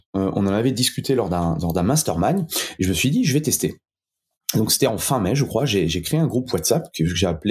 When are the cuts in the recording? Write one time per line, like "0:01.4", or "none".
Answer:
none